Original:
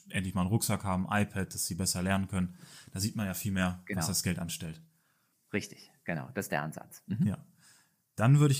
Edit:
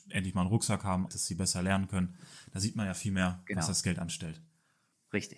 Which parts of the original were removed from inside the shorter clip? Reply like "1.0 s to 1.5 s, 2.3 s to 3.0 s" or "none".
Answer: 1.1 s to 1.5 s